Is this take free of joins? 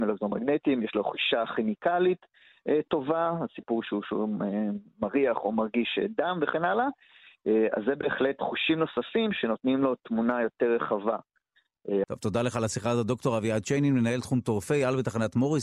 no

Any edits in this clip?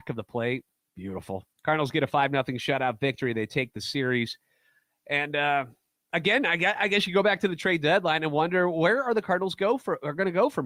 yes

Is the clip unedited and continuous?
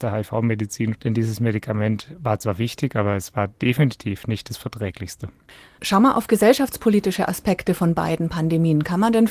no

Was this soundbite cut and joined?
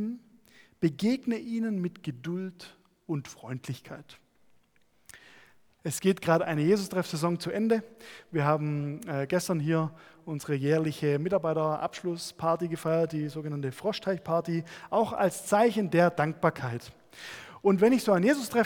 yes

